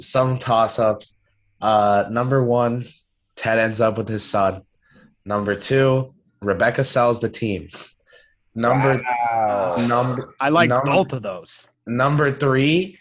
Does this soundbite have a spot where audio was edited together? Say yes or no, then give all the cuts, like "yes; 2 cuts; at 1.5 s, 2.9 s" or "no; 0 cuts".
no; 0 cuts